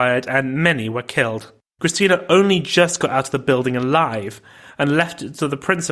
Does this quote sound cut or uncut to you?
cut